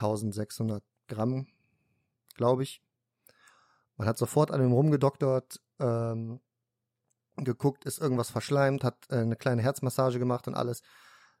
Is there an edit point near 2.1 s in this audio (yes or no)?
no